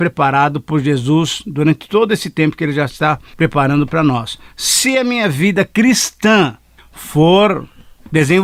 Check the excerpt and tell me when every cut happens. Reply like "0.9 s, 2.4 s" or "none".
none